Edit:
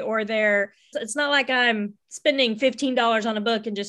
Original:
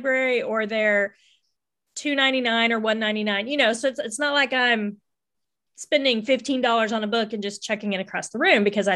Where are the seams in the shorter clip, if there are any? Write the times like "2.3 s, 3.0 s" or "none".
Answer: 0.9 s, 2.0 s